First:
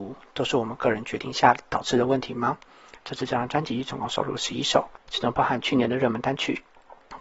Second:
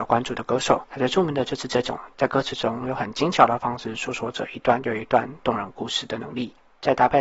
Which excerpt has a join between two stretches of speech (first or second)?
first